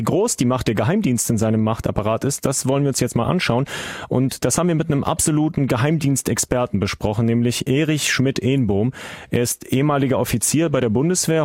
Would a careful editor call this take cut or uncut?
uncut